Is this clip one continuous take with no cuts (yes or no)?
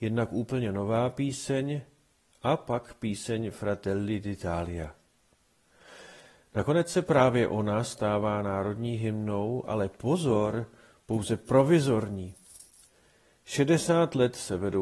yes